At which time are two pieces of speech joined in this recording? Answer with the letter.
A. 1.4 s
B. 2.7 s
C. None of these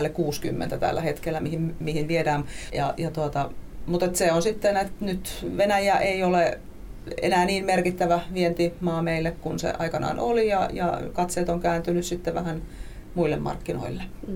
B